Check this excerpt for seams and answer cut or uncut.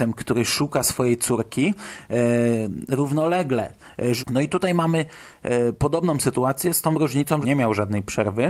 cut